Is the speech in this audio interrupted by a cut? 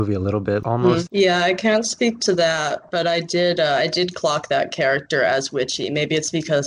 yes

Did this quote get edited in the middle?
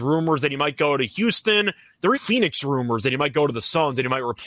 yes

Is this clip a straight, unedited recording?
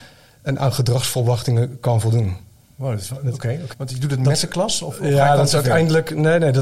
no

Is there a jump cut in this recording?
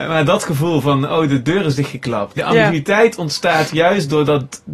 yes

